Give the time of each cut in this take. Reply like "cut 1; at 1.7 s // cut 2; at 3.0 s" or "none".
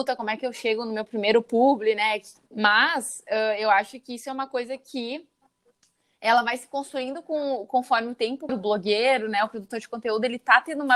cut 1; at 2.5 s // cut 2; at 8.5 s

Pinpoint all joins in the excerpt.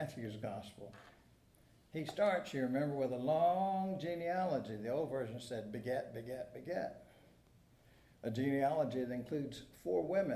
none

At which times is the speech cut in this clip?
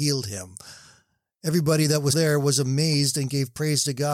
cut 1; at 2.1 s

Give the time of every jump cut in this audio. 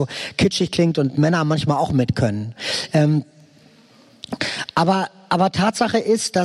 none

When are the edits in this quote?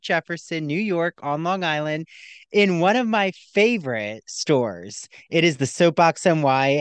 none

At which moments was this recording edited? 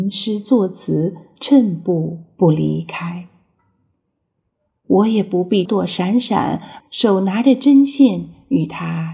cut 1; at 5.7 s // cut 2; at 6.8 s

